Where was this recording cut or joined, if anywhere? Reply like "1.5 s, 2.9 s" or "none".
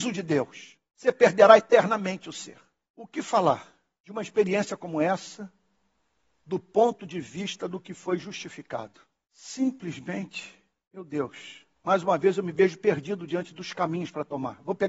none